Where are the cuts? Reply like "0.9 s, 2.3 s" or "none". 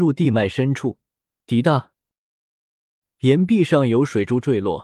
1.4 s